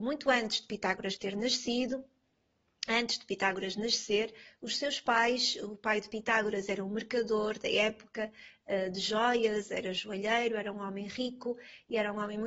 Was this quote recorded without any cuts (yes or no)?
yes